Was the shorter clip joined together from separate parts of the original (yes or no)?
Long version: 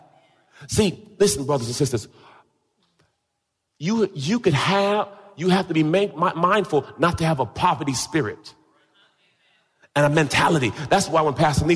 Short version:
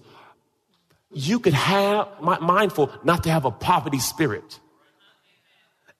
yes